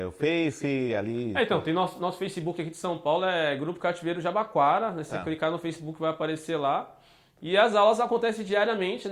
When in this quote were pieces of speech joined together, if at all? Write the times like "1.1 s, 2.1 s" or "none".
none